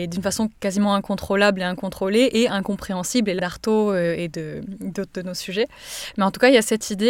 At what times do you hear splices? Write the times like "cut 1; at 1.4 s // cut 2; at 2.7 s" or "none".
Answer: cut 1; at 3.4 s